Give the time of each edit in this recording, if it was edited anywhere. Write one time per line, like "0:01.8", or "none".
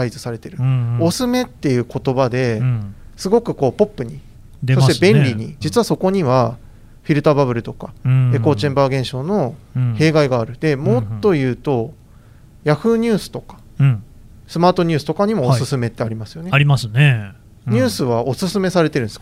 0:01.1
0:05.6